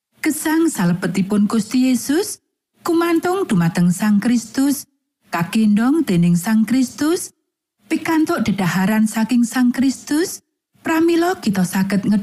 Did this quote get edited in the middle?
no; 0 cuts

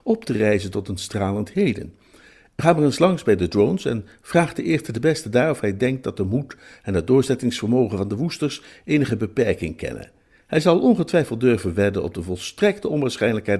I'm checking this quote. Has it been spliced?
no; 0 cuts

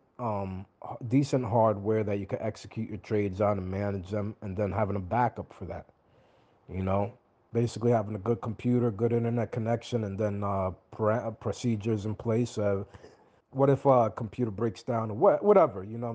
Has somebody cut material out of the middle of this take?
no; 0 cuts

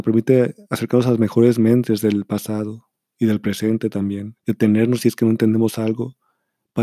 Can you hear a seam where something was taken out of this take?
yes; 1 cut; at 4.4 s

